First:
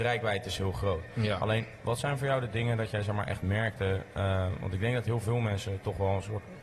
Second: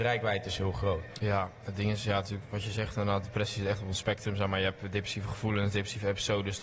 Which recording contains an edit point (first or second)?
second